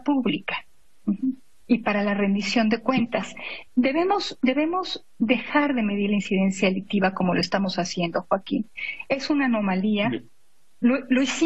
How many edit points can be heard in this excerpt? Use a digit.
0